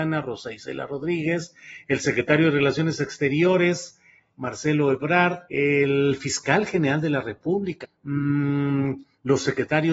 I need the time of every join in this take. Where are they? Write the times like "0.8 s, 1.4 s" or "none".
5.5 s, 7.8 s